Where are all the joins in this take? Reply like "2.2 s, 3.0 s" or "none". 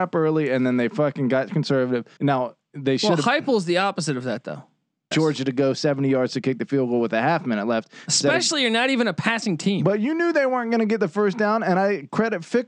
2.2 s, 5.1 s